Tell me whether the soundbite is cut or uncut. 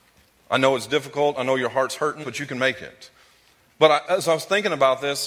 cut